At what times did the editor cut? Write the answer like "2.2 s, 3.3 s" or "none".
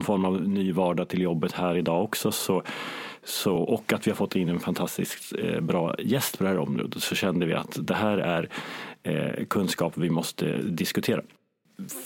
none